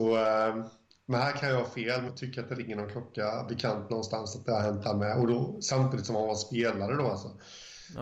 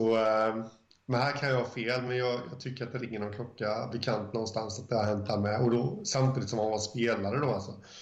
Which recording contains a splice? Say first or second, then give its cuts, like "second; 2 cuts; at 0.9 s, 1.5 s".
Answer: first; 1 cut; at 2.1 s